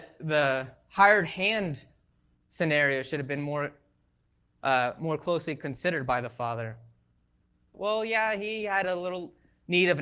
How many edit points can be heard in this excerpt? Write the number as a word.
one